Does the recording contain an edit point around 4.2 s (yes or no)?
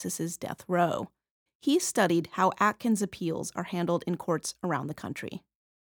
no